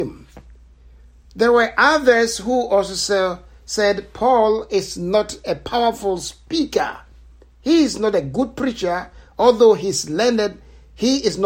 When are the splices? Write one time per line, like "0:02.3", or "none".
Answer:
none